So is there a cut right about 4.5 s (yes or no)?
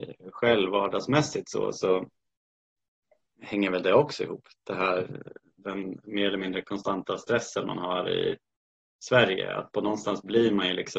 no